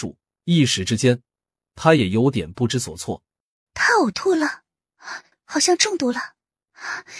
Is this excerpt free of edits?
no; 2 cuts; at 3.7 s, 5.3 s

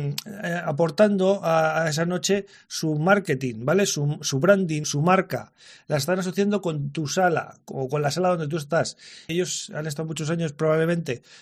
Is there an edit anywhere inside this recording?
yes; 2 cuts; at 4.8 s, 9.3 s

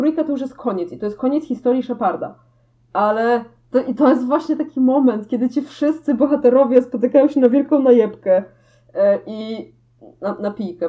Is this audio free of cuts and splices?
yes; 0 cuts

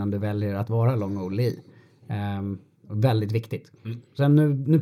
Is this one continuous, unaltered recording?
yes; 0 cuts

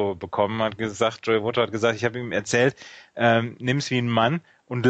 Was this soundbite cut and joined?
no; 0 cuts

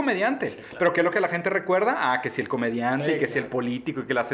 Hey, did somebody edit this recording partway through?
no; 0 cuts

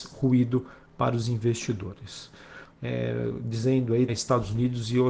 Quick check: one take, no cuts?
no; 2 cuts; at 2.7 s, 4.1 s

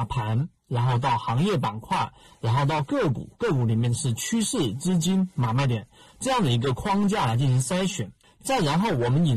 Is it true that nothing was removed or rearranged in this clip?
no; 1 cut; at 8.2 s

